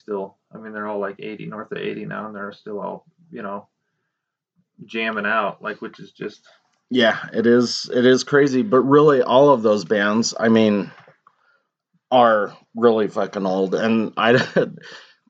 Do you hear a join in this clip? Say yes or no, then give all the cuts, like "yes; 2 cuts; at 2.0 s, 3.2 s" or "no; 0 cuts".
no; 0 cuts